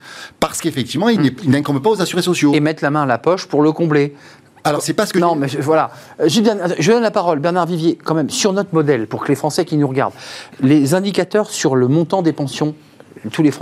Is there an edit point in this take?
no; 0 cuts

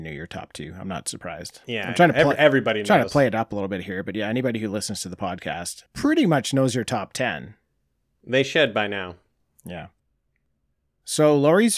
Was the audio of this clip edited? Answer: yes; 1 cut; at 5.9 s

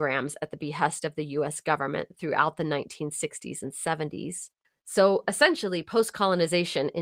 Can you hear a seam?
no; 0 cuts

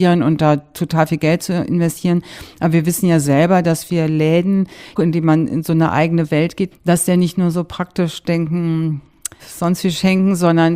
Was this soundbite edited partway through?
yes; 3 cuts; at 5.0 s, 6.7 s, 9.4 s

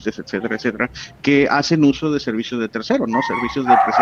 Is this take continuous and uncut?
yes; 0 cuts

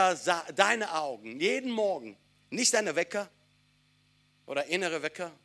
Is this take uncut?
yes; 0 cuts

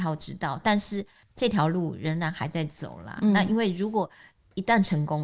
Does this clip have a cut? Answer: no; 0 cuts

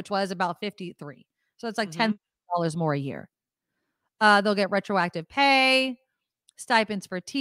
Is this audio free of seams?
yes; 0 cuts

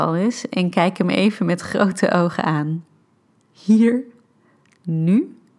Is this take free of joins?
yes; 0 cuts

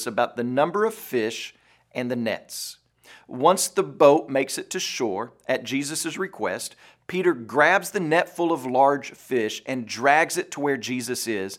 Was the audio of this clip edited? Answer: no; 0 cuts

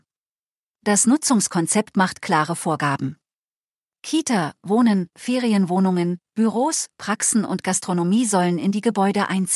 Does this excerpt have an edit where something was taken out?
yes; 1 cut; at 5.1 s

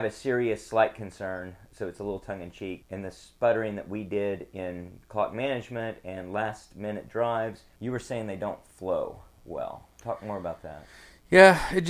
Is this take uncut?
no; 2 cuts; at 2.8 s, 7.8 s

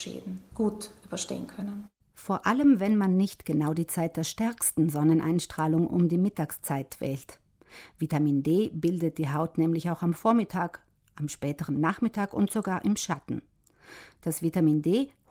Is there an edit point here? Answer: no; 0 cuts

